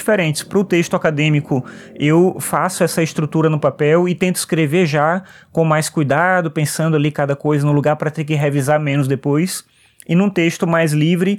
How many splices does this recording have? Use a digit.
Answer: 0